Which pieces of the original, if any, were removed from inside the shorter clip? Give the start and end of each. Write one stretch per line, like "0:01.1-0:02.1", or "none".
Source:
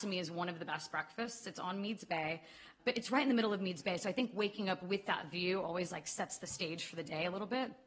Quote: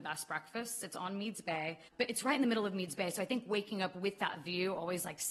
0:02.5-0:02.7

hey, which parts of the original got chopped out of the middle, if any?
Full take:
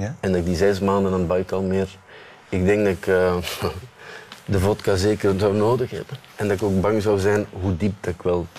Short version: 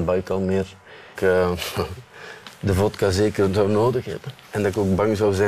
0:02.4-0:03.0

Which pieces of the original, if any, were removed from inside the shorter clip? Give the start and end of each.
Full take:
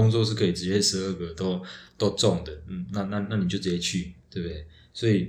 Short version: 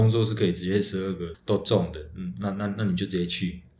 0:01.3-0:01.9

